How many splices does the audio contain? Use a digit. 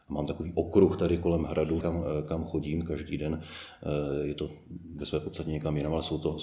1